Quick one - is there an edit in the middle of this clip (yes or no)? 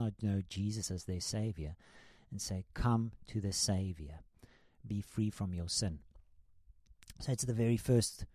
no